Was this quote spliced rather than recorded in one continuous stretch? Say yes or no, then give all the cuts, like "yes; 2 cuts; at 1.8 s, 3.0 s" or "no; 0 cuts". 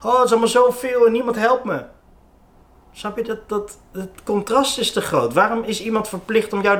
no; 0 cuts